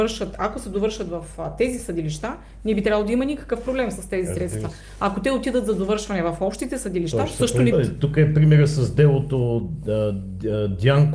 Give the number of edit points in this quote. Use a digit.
1